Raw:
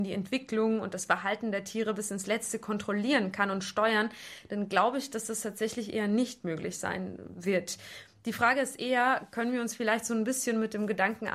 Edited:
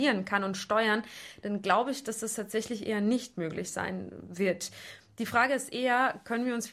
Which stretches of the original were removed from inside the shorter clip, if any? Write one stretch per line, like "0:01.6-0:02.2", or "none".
none